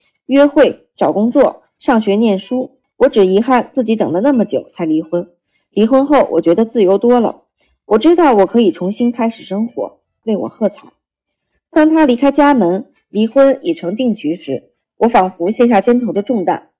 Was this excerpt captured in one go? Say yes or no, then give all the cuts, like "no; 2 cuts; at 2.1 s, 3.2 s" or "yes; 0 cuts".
no; 2 cuts; at 2.8 s, 10.2 s